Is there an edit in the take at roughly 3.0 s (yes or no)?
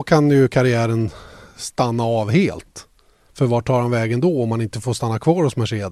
no